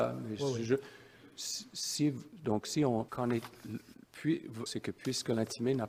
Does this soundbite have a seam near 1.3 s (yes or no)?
no